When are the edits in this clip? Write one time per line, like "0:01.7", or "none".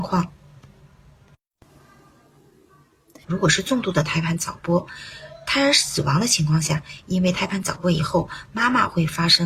0:03.2
0:07.0